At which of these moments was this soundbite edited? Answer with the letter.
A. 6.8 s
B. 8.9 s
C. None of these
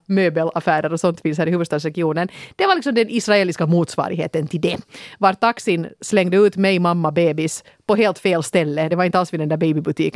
C